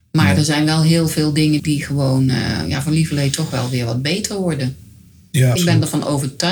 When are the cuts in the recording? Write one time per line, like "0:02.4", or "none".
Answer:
0:01.6
0:05.6